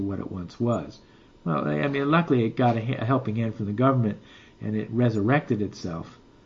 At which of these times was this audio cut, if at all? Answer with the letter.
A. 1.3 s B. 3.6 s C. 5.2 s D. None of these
A